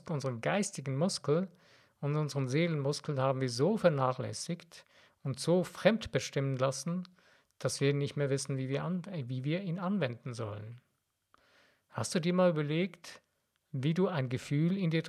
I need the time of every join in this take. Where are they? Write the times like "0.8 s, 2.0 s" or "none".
none